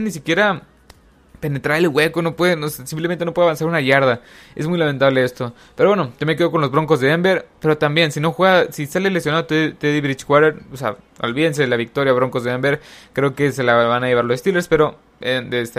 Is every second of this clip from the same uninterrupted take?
yes; 0 cuts

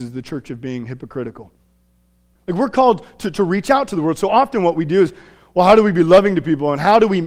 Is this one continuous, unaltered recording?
no; 1 cut; at 2.4 s

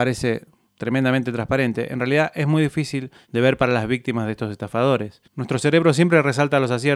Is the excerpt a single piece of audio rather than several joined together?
no; 1 cut; at 5.3 s

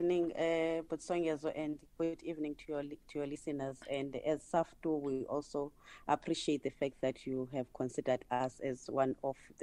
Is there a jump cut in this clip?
no; 0 cuts

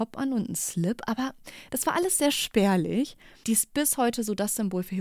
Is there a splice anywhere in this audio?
yes; 1 cut; at 3.4 s

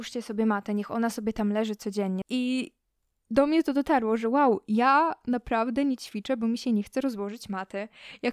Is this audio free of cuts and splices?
no; 1 cut; at 2.2 s

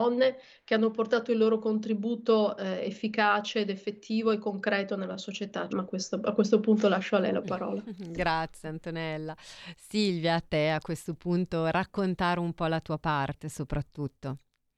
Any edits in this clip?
yes; 1 cut; at 5.7 s

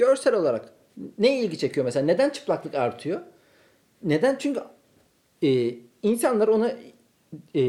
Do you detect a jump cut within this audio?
no; 0 cuts

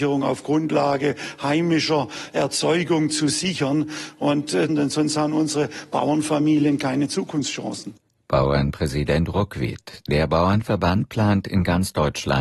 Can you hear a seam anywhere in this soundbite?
yes; 1 cut; at 4.7 s

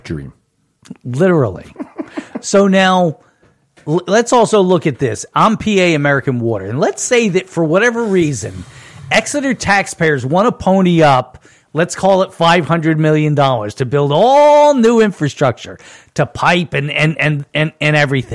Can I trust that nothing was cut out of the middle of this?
yes; 0 cuts

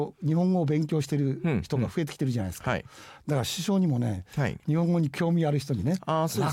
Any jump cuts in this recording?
yes; 1 cut; at 4.6 s

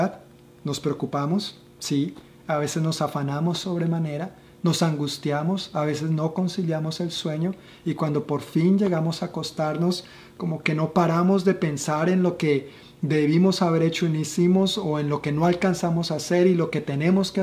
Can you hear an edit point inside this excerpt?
no; 0 cuts

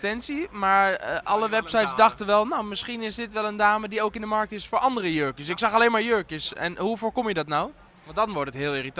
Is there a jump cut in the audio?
no; 0 cuts

